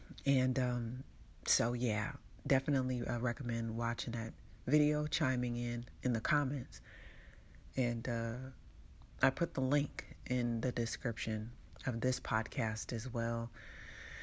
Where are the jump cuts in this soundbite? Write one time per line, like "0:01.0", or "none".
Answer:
none